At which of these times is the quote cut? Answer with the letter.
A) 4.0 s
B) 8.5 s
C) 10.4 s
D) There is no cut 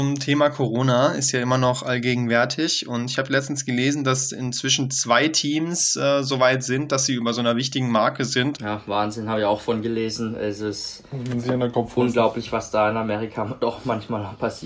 B